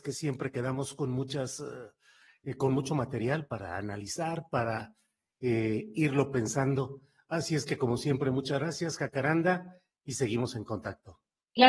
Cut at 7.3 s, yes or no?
no